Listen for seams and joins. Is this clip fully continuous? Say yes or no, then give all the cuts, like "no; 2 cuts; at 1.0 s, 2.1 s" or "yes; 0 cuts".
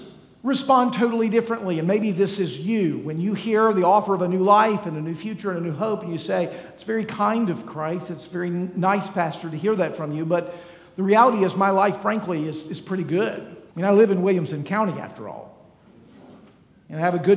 no; 1 cut; at 13.7 s